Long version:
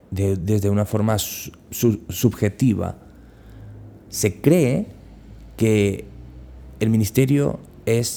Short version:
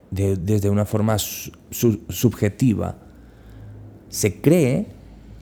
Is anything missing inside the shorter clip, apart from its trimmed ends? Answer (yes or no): no